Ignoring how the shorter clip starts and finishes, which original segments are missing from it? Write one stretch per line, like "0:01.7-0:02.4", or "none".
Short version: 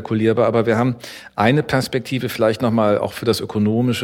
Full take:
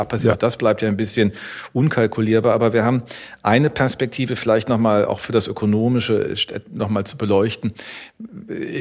none